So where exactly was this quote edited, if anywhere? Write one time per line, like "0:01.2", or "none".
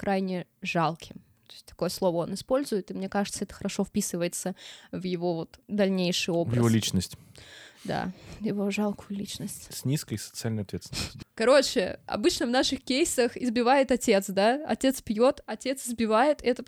0:09.7
0:11.2

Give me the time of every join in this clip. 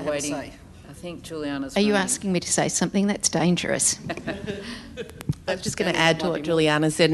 none

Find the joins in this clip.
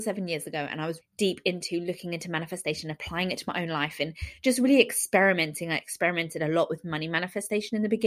0:01.0

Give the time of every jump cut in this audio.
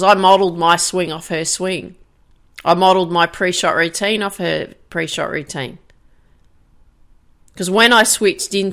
none

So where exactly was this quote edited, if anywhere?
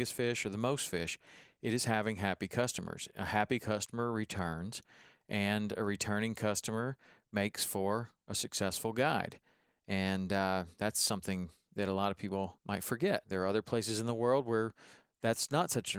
0:13.2

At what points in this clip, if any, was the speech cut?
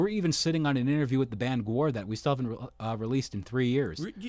none

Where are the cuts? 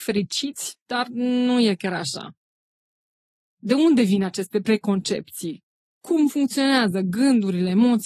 none

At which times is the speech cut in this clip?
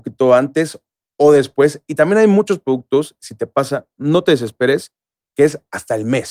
none

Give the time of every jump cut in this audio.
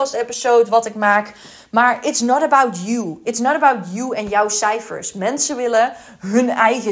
none

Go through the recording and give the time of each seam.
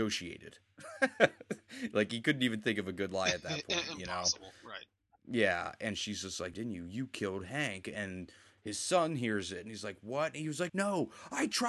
0:06.5
0:10.7

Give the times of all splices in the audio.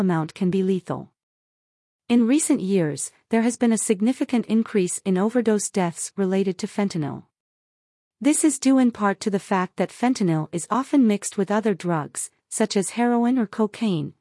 none

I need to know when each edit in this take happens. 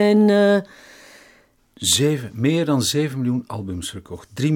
0:01.6

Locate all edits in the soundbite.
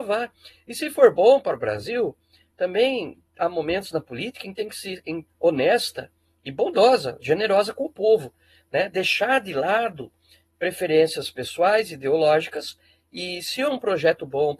0:05.3

